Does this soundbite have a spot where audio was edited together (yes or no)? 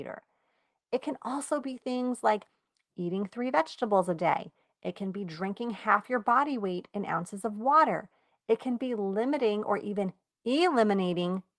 no